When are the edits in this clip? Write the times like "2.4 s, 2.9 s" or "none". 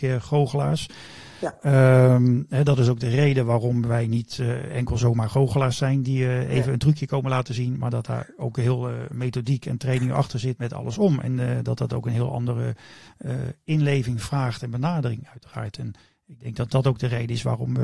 10.6 s